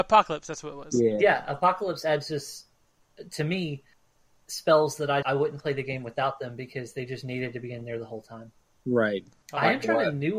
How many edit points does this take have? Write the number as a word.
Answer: two